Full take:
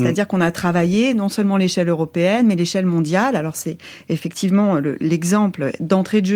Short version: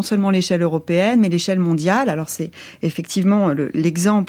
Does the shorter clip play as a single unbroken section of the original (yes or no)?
yes